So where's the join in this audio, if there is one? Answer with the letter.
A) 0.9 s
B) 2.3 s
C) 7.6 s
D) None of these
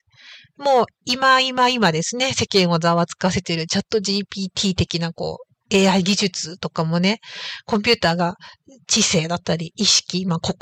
D